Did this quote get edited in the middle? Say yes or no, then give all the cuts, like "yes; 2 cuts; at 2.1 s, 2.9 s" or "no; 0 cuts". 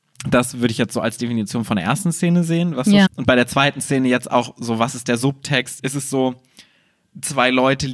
yes; 2 cuts; at 3.1 s, 5.8 s